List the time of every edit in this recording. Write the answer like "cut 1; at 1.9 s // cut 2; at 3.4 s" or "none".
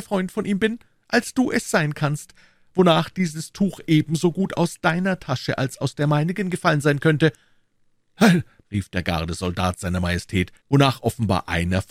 cut 1; at 8.6 s // cut 2; at 10.6 s